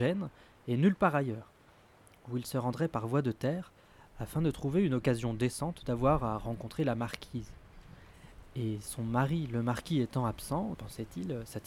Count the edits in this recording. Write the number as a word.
one